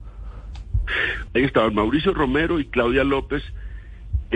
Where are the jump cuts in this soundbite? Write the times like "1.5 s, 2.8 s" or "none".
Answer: 1.3 s